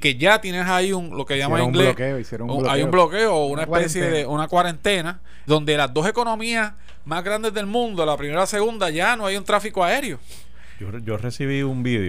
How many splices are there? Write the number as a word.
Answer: one